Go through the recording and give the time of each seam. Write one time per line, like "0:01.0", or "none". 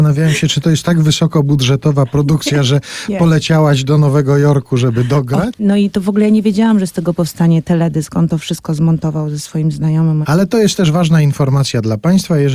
0:05.5
0:10.2